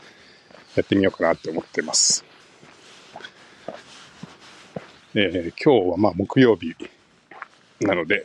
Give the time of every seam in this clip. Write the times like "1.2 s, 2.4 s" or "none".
5.0 s

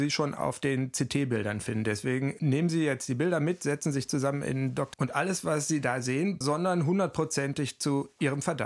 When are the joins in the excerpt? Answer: 4.9 s, 6.4 s

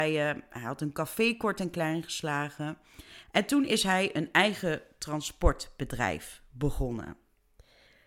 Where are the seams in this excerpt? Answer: 3.2 s

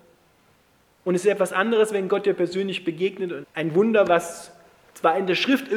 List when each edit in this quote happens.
3.4 s

